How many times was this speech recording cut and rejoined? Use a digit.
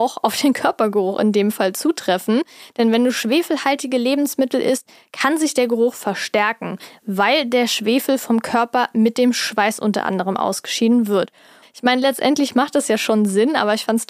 1